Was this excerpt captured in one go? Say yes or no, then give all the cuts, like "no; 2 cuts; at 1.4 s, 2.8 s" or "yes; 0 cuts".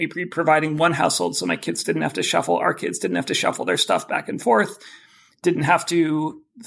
yes; 0 cuts